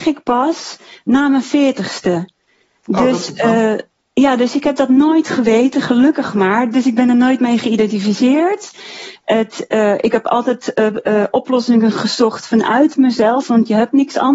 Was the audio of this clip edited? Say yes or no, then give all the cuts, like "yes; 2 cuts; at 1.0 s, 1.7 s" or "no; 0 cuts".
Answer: no; 0 cuts